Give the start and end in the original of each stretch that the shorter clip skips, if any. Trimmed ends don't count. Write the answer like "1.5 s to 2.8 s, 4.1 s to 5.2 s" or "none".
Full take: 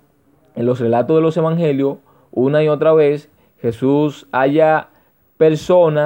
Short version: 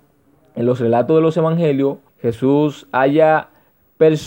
2.1 s to 3.5 s